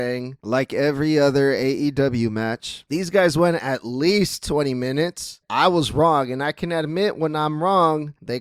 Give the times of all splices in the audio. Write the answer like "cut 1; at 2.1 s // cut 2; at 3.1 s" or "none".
cut 1; at 2.9 s // cut 2; at 5.4 s